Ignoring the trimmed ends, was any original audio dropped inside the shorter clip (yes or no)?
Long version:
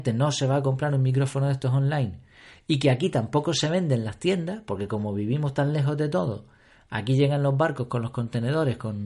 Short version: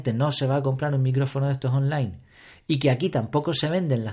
no